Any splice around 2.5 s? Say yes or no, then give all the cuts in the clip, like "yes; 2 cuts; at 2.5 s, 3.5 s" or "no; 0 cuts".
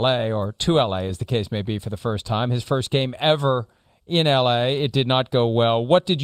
no; 0 cuts